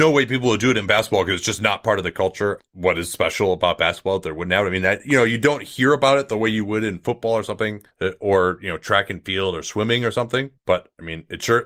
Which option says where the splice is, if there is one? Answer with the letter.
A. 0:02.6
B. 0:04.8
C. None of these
A